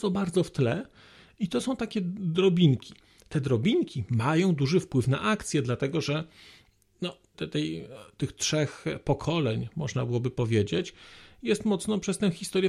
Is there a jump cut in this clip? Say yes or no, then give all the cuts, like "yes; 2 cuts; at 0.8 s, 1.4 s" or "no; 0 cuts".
yes; 1 cut; at 7.3 s